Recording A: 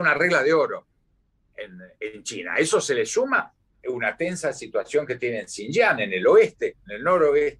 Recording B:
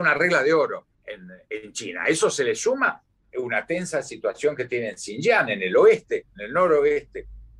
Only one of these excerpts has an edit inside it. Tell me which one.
B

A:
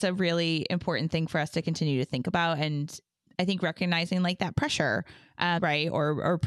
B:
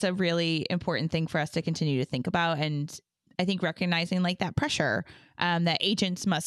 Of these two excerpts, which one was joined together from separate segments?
A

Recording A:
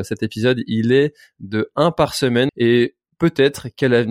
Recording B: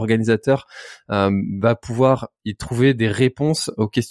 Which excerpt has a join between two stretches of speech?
A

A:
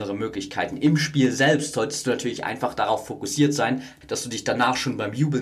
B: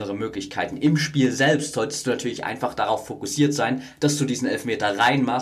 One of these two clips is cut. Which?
A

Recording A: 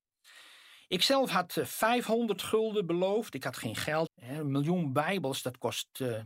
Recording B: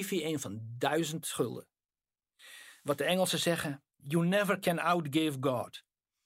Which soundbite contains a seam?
A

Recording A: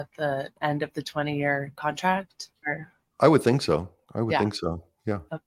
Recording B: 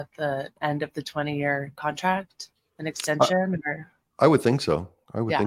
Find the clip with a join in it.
A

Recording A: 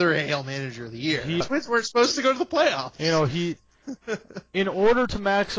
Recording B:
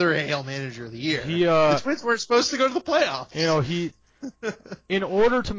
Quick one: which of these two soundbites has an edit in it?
A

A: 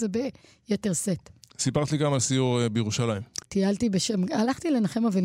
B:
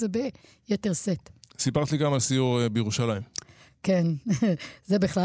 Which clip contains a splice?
A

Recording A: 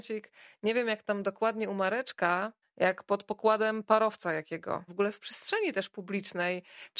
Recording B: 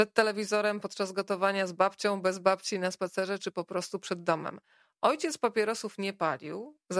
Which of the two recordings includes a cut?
A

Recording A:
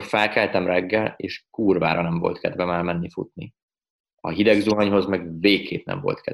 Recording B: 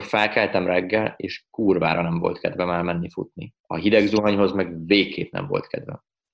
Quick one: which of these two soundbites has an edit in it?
B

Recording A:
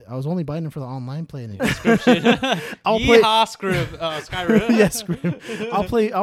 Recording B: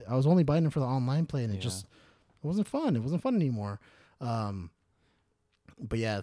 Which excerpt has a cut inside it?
A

